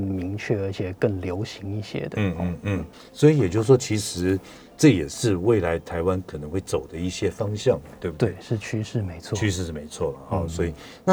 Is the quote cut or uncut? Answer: uncut